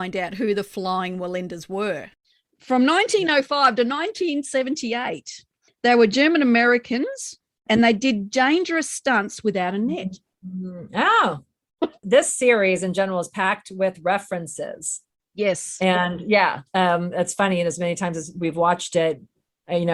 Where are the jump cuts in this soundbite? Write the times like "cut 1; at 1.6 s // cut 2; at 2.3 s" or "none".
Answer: none